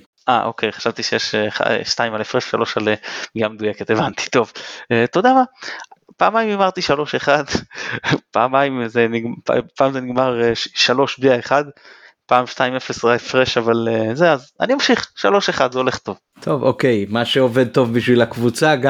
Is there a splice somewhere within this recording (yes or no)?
no